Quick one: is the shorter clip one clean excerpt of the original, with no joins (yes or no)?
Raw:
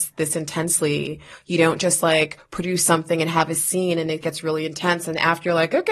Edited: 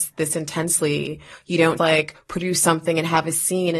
no